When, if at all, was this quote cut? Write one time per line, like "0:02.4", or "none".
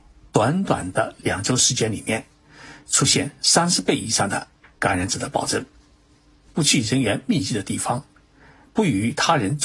0:06.5